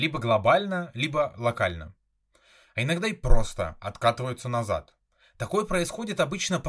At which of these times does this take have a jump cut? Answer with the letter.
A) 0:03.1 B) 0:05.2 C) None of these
C